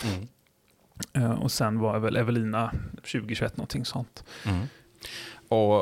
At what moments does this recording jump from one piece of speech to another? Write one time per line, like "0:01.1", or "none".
0:03.0